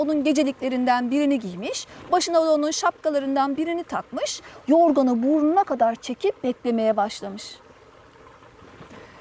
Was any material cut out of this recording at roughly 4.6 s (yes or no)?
yes